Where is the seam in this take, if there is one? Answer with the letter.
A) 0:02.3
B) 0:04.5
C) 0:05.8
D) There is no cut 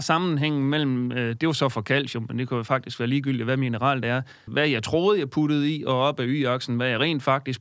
B